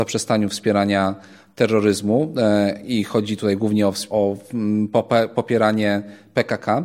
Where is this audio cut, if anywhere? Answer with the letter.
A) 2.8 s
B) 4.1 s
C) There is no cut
B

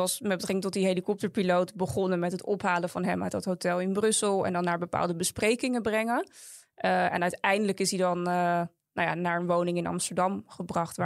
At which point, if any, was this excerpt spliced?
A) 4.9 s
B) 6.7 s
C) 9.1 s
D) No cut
D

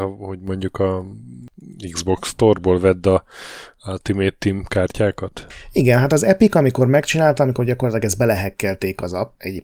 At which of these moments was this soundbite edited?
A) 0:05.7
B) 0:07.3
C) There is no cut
C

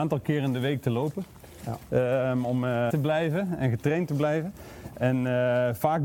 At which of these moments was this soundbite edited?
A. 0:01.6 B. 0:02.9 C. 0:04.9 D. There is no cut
B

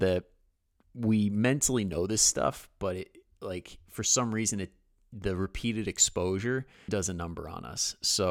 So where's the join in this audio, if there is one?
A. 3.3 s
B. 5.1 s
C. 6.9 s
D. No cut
C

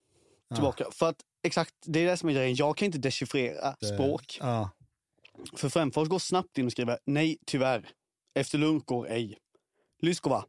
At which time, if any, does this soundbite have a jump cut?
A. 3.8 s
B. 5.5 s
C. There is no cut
A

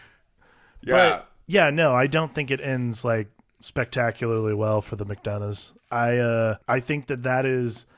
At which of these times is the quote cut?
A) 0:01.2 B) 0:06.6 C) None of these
B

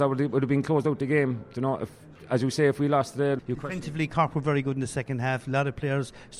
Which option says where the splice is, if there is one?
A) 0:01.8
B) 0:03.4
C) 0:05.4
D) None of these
B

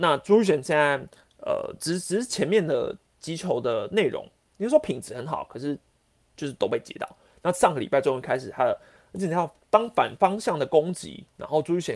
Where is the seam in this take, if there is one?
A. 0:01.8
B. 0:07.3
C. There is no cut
C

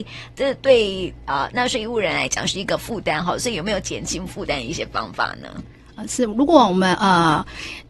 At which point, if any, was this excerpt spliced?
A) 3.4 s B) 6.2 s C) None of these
C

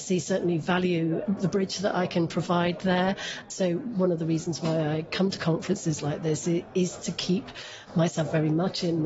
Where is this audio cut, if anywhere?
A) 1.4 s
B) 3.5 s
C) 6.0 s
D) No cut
B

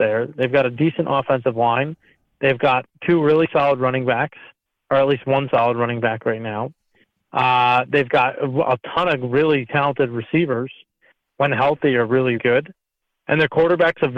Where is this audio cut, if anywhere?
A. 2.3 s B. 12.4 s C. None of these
B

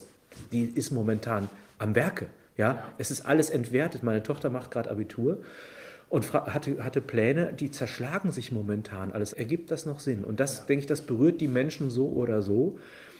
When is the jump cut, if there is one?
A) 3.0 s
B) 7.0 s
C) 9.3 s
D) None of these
C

